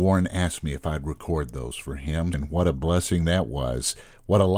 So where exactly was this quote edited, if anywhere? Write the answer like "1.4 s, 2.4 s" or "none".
2.3 s